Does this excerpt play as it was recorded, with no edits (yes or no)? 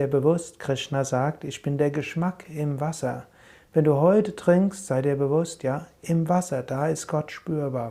yes